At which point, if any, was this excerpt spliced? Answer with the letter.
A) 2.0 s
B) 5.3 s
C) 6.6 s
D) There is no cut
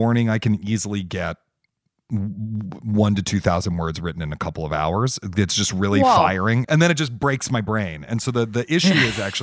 C